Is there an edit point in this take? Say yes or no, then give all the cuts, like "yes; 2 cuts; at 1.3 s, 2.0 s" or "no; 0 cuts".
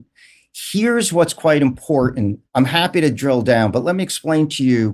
yes; 1 cut; at 2.5 s